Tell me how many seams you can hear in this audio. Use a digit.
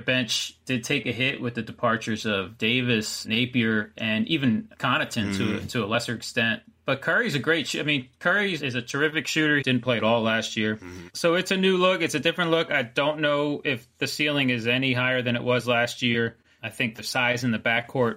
1